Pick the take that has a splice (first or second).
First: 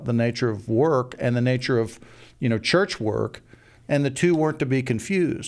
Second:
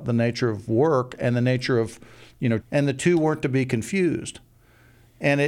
second